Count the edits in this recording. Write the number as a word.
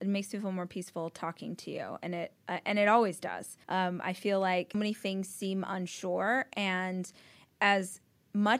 two